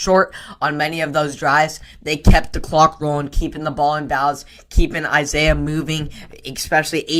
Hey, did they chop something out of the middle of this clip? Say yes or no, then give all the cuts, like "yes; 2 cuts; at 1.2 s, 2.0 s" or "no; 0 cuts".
no; 0 cuts